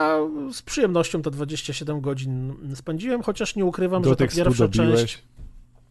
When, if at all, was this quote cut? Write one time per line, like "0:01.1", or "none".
none